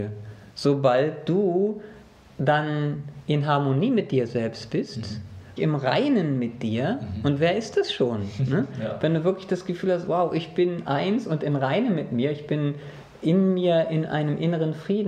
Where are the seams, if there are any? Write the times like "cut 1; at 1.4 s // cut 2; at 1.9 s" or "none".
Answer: cut 1; at 5.6 s